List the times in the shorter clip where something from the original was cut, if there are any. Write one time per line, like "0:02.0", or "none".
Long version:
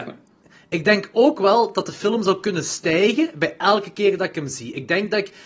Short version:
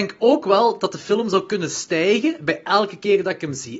none